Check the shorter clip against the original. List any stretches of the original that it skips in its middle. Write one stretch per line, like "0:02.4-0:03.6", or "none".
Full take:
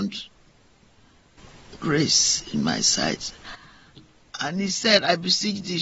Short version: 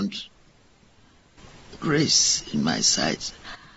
none